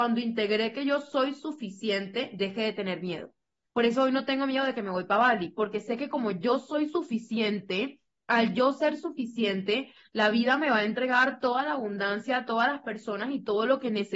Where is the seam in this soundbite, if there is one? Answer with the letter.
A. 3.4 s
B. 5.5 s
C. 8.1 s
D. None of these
D